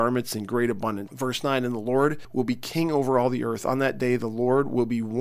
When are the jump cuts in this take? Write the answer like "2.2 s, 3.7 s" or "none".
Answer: 1.1 s